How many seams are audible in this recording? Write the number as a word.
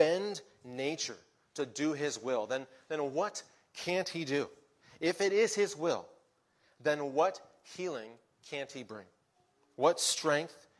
zero